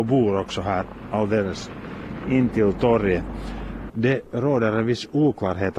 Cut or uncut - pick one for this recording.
cut